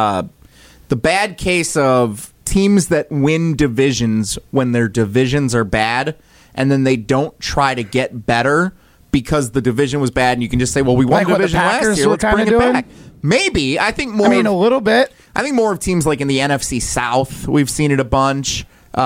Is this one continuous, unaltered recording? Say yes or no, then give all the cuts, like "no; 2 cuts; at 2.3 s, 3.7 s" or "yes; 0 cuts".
yes; 0 cuts